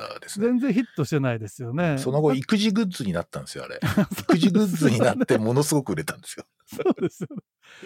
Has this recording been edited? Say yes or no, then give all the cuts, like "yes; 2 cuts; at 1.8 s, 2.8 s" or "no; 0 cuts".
no; 0 cuts